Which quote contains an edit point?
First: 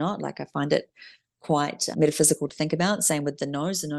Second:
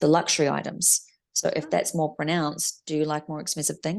first; 1 cut; at 1.9 s

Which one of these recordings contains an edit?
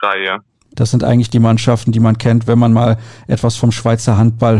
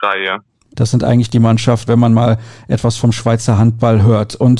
second; 1 cut; at 1.9 s

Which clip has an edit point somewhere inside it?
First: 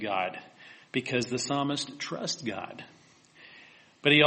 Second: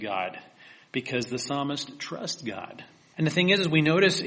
second; 1 cut; at 3.1 s

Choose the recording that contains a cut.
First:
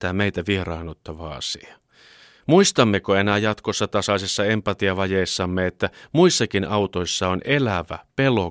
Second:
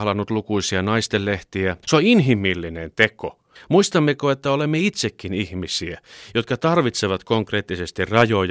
second; 2 cuts; at 1.8 s, 3.6 s

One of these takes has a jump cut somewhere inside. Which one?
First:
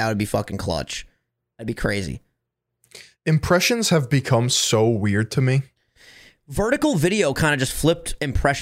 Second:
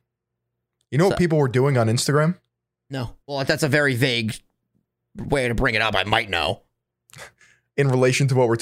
second; 1 cut; at 3.2 s

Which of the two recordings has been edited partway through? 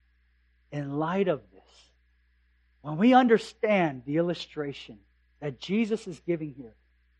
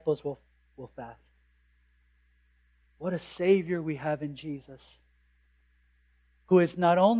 second; 1 cut; at 2.8 s

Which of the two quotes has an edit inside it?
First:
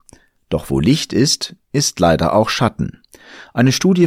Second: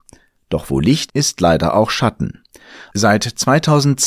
second; 2 cuts; at 1.1 s, 2.9 s

